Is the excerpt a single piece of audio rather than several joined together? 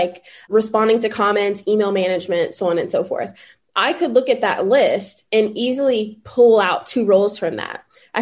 yes; 0 cuts

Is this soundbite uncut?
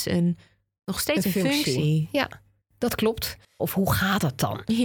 no; 1 cut; at 3.6 s

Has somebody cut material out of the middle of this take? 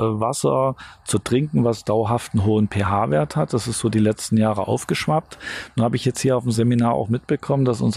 no; 0 cuts

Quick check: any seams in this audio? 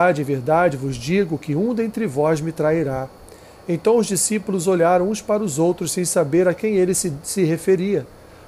no; 0 cuts

